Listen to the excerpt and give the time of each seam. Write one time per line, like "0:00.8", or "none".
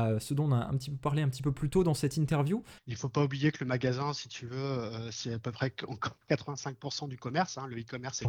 0:02.8